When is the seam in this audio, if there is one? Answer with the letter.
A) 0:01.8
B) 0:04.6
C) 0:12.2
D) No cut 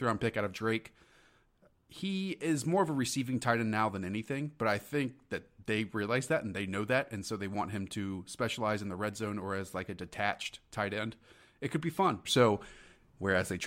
C